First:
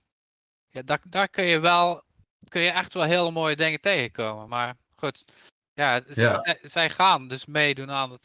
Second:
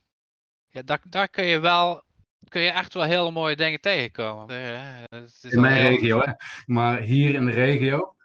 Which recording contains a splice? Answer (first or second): second